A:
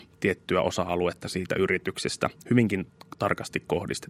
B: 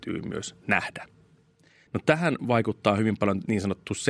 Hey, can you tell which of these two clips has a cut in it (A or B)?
B